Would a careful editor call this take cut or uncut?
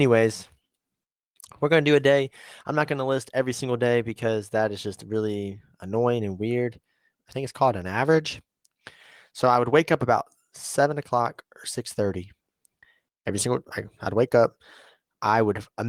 cut